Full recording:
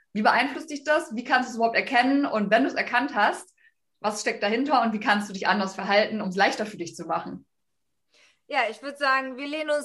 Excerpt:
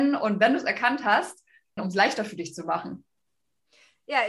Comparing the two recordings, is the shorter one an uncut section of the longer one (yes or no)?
no